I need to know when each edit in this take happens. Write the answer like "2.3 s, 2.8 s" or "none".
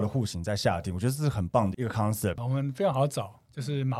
2.4 s